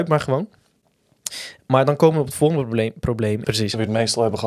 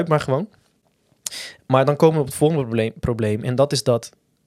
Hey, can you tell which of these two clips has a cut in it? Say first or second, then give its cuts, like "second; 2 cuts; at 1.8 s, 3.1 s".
first; 1 cut; at 3.4 s